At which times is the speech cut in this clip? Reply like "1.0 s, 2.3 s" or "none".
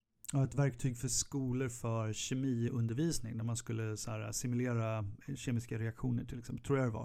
none